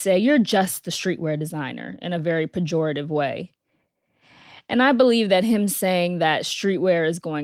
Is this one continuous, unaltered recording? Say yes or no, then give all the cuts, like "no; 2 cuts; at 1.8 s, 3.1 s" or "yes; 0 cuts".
yes; 0 cuts